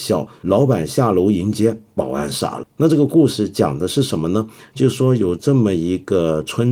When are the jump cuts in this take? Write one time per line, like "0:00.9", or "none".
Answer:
none